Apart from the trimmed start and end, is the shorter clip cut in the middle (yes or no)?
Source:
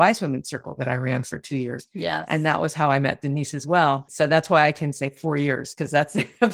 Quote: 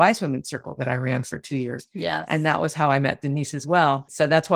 no